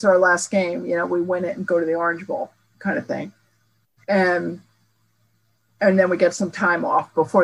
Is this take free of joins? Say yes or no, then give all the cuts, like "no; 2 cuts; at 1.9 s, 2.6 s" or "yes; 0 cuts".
yes; 0 cuts